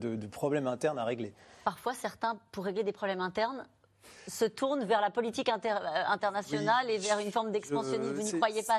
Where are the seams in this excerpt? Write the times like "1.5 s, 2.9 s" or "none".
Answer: none